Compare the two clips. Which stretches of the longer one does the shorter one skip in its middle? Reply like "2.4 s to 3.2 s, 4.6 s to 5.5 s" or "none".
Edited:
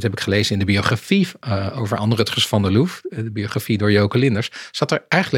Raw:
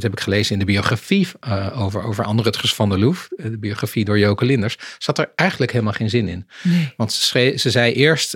1.8 s to 2.0 s